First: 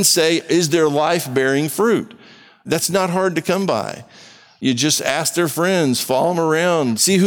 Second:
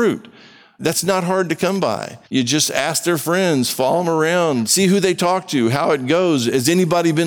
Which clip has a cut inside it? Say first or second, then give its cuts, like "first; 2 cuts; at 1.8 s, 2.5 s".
second; 1 cut; at 2.3 s